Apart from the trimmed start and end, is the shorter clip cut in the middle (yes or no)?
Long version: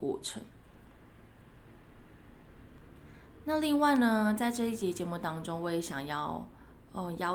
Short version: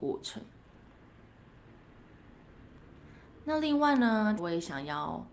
yes